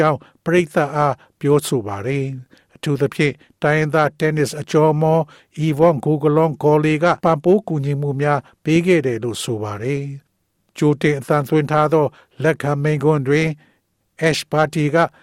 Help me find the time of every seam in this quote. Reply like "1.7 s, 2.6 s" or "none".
7.2 s